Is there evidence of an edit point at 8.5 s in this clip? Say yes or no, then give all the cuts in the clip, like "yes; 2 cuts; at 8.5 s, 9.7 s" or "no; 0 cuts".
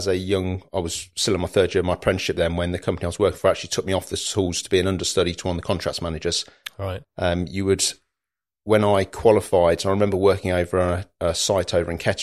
no; 1 cut; at 7.0 s